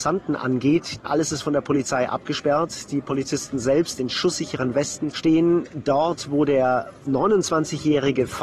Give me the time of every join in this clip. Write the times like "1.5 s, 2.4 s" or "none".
5.1 s